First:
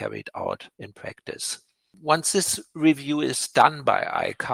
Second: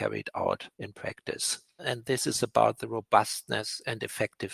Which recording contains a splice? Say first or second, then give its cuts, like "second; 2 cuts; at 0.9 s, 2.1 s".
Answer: second; 1 cut; at 1.8 s